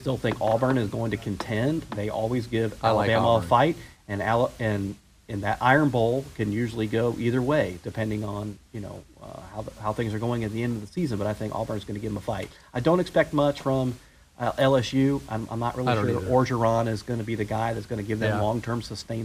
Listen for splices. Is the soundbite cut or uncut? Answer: uncut